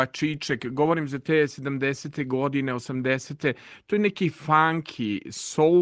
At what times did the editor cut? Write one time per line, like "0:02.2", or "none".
none